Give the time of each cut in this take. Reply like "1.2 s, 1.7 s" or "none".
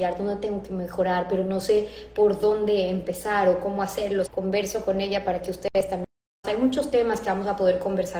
4.3 s, 6.4 s